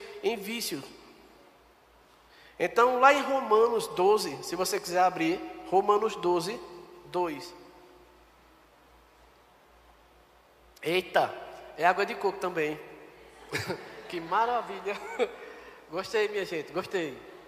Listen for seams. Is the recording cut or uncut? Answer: uncut